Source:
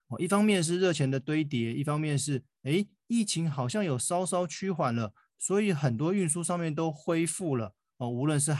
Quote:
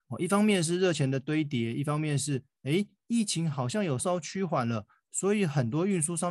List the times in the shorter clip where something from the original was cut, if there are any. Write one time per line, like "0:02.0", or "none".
0:04.0